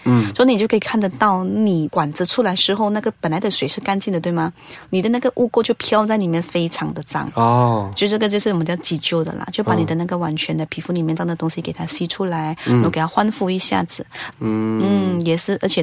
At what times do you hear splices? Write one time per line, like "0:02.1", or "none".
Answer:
0:11.2
0:14.3